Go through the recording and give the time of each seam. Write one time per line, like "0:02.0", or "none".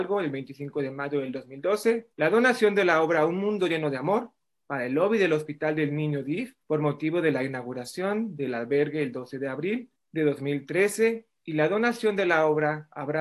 0:02.1
0:06.6